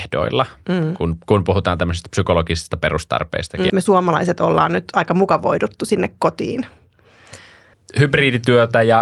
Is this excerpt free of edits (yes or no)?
no